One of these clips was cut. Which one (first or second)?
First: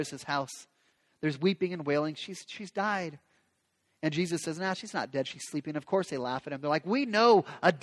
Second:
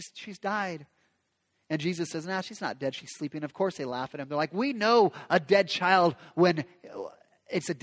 first